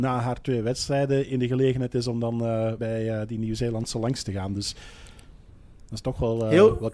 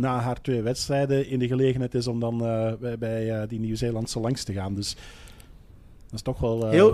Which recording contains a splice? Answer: first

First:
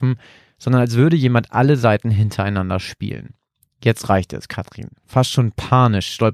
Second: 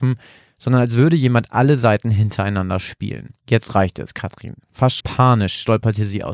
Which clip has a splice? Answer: second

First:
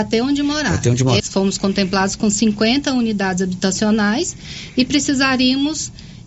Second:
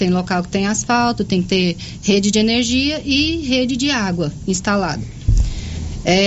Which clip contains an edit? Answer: first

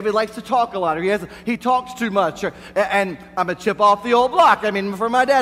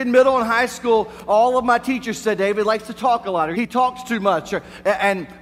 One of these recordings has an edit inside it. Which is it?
second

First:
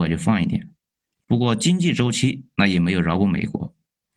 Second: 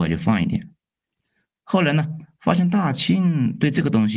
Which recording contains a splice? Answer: first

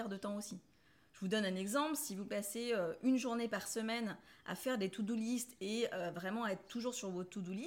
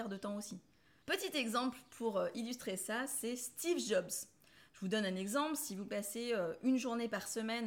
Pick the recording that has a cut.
second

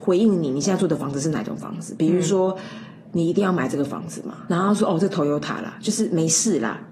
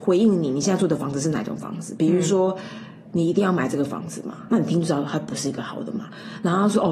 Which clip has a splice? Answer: first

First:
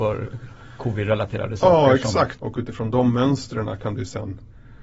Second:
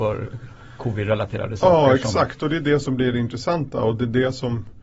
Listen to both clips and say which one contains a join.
first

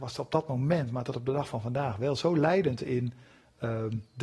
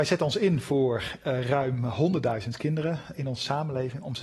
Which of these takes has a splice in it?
second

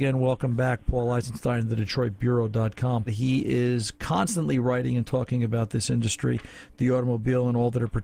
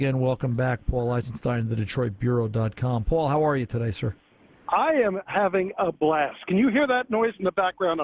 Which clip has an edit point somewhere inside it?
first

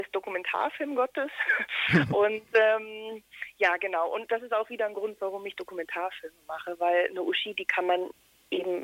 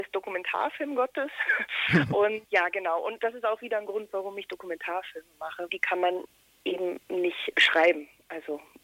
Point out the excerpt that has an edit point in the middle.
second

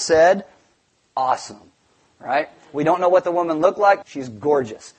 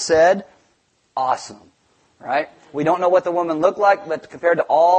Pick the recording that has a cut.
first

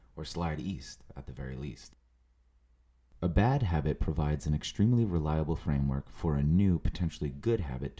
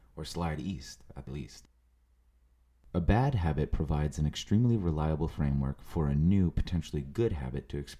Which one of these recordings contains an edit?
second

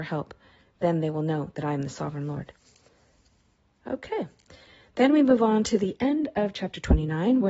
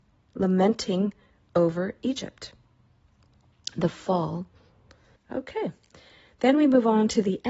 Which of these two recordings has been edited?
second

